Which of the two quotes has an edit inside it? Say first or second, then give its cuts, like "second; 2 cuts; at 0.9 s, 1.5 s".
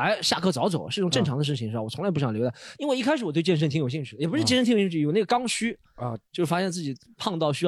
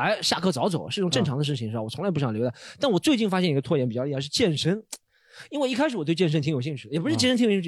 first; 1 cut; at 2.8 s